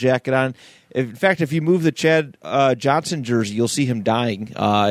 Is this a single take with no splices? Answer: yes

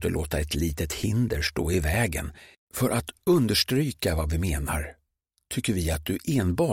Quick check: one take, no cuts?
no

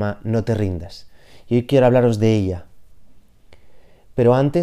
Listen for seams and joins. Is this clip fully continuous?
yes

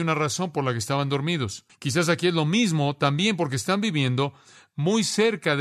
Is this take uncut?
no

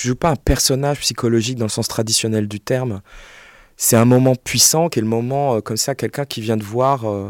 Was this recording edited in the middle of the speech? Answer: no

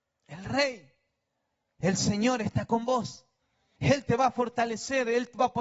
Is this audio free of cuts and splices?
no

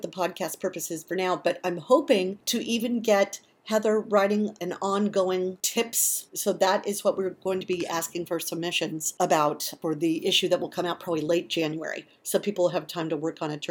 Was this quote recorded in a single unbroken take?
no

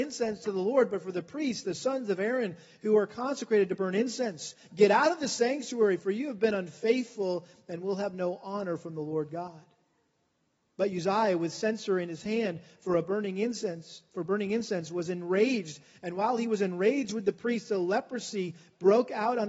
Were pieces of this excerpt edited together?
no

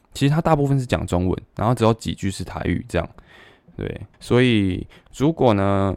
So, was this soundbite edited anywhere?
yes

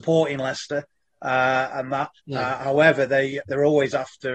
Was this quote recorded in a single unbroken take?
no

